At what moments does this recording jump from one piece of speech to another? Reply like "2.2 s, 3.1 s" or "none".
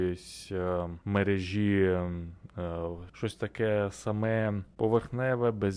1.0 s, 3.1 s

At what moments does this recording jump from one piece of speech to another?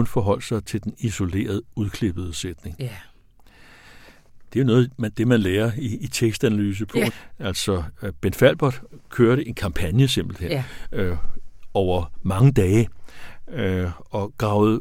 7.1 s

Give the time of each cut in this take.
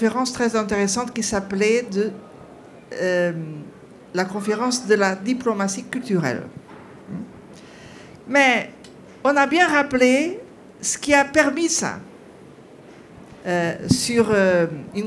8.2 s, 13.4 s

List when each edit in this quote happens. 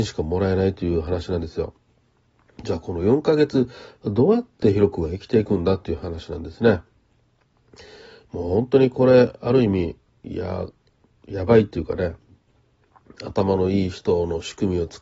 none

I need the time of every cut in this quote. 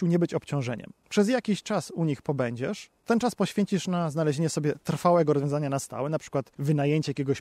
none

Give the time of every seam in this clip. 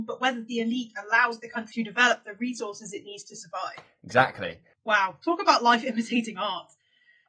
4.7 s

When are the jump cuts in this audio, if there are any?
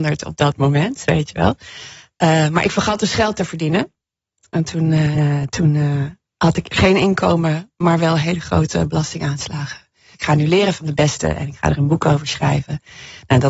5.1 s, 10.1 s

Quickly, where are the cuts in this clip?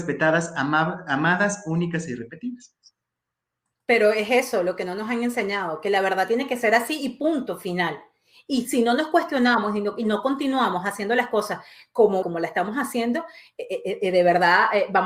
12.2 s

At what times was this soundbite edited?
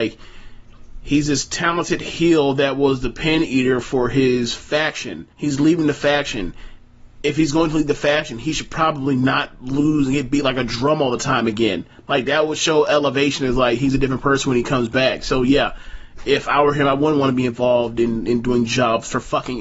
5.3 s

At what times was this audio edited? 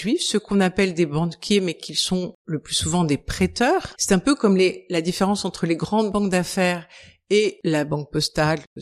4.0 s

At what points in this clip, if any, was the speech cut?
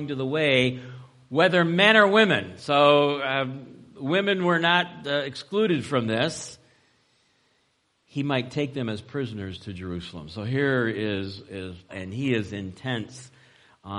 11.9 s

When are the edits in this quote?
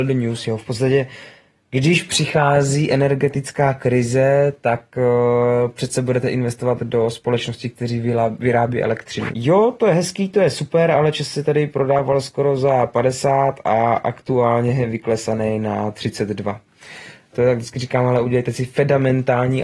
9.3 s, 17.3 s

